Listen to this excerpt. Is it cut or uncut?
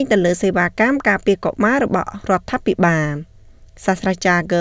uncut